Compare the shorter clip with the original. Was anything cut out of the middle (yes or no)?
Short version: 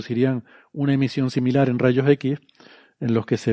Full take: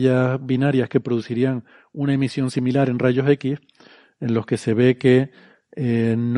no